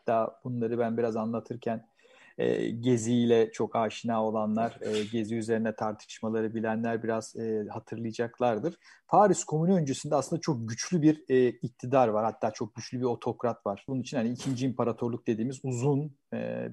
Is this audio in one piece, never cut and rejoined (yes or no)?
no